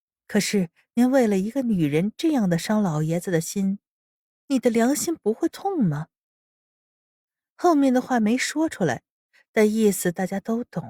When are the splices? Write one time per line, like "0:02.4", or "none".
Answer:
none